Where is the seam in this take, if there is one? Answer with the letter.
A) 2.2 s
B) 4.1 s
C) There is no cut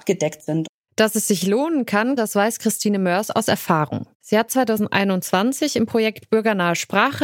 A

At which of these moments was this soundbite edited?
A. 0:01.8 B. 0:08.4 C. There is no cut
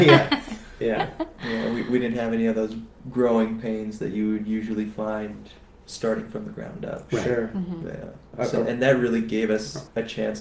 C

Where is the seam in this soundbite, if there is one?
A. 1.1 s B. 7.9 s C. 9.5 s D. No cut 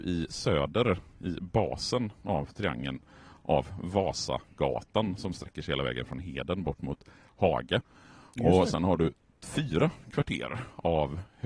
D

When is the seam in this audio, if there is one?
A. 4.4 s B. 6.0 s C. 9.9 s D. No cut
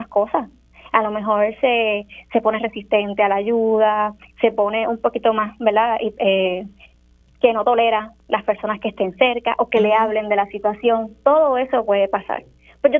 D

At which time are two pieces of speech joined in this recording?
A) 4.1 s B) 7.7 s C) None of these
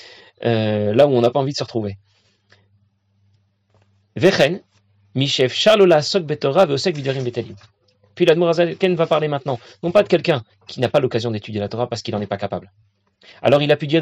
C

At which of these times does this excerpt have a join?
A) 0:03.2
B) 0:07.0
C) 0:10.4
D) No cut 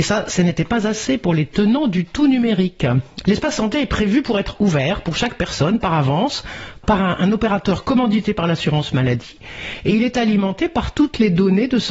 A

